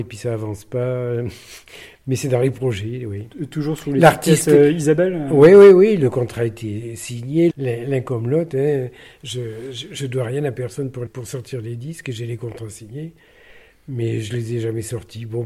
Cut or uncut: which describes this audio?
cut